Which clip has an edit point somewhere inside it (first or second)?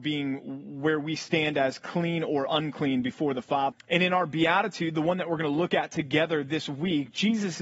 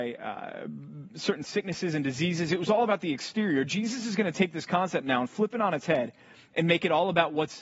first